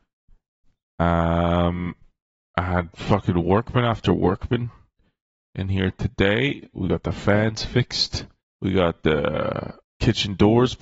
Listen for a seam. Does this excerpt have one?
yes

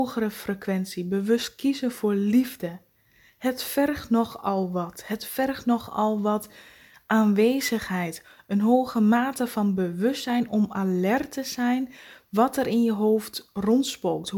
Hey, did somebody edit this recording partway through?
no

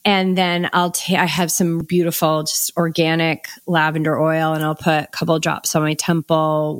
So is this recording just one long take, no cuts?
no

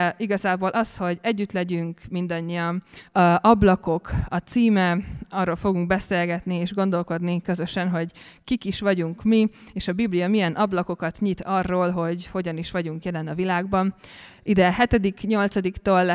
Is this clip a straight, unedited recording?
no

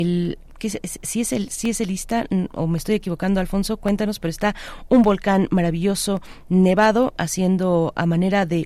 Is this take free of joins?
yes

